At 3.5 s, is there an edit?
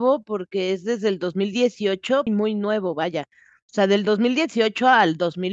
no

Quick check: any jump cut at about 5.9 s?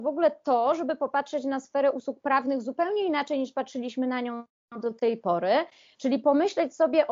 no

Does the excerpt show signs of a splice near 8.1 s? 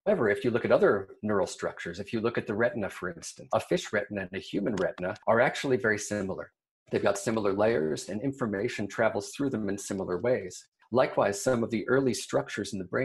yes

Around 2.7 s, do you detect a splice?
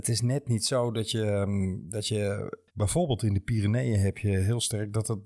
yes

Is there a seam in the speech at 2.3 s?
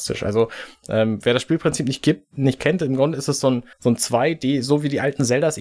no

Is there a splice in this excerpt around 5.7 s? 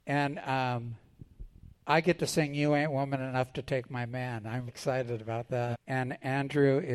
yes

